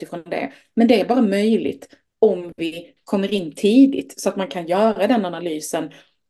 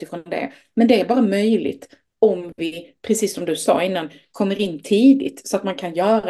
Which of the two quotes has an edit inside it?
first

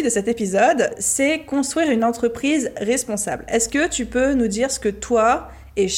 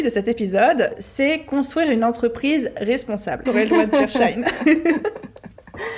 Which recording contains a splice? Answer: second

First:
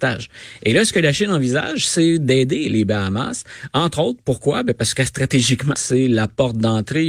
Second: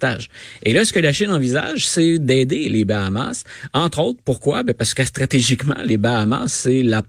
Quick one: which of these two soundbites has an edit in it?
first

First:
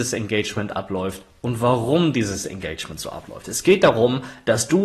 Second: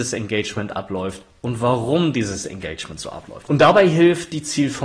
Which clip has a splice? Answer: second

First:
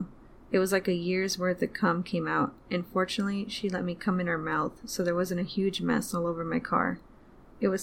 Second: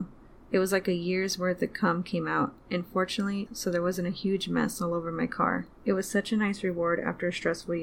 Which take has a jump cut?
second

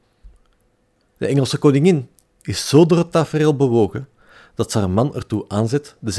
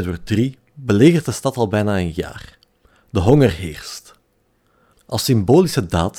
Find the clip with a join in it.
second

